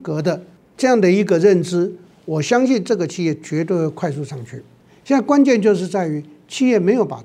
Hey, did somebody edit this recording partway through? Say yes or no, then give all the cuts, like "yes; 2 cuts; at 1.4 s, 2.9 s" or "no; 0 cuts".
no; 0 cuts